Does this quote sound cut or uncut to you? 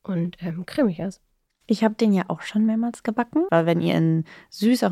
cut